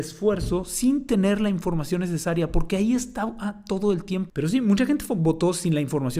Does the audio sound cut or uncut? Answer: cut